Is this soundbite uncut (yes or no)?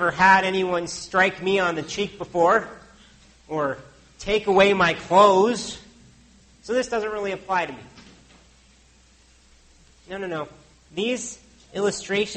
yes